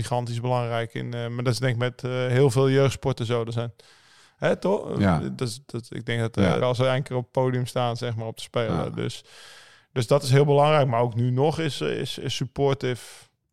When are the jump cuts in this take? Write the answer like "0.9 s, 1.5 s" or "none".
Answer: 6.6 s